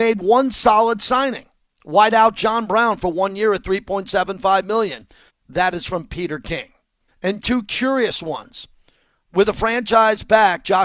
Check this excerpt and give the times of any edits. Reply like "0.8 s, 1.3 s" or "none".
5.3 s, 7.1 s